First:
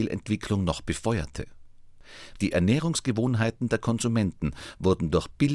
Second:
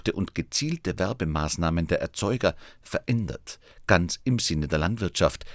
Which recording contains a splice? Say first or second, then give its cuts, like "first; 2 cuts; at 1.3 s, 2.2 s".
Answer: first; 1 cut; at 2.4 s